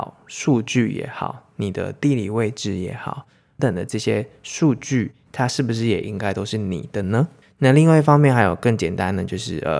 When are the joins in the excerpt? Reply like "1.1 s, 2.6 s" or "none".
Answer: 3.6 s, 7.4 s